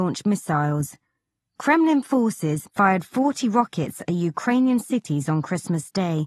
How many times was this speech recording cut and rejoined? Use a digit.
1